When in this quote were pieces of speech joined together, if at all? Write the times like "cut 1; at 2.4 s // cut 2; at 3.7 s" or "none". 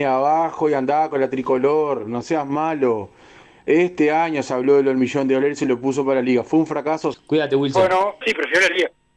cut 1; at 7.1 s // cut 2; at 8.2 s

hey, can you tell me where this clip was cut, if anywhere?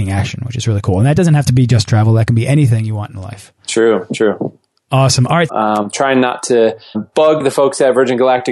cut 1; at 5.5 s // cut 2; at 6.9 s

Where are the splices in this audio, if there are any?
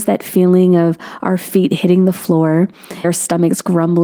cut 1; at 3.0 s

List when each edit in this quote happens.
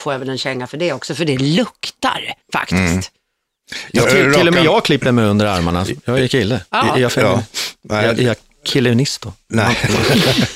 cut 1; at 2.4 s // cut 2; at 4.0 s

